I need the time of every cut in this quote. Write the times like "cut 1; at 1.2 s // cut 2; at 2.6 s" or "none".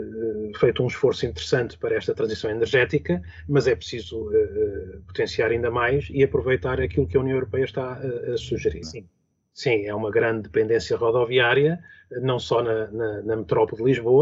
cut 1; at 8.8 s